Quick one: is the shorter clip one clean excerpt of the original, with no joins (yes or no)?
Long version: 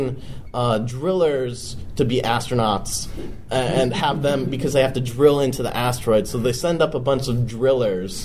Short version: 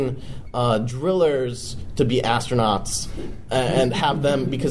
yes